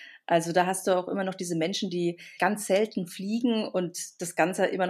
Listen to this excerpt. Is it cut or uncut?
cut